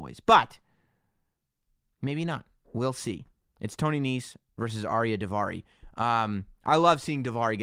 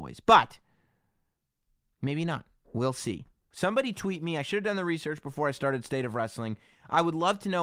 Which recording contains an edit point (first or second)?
second